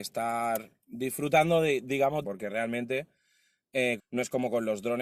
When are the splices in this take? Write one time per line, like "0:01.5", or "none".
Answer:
0:02.2
0:04.0